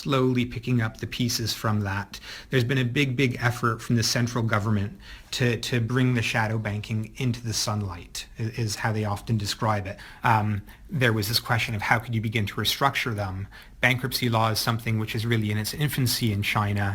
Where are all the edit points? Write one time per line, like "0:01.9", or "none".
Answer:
0:10.2